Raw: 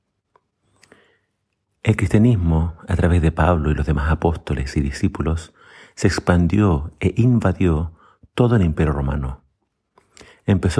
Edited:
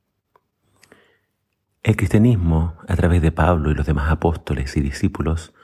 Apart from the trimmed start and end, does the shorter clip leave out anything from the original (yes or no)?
no